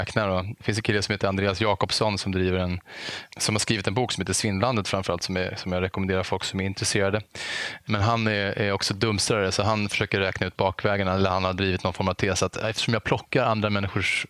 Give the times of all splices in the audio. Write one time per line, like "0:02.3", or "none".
none